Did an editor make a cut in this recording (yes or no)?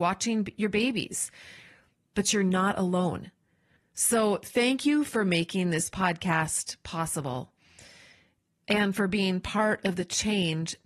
yes